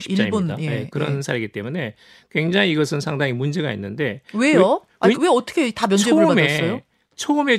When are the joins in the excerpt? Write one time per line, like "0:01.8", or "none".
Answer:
0:05.2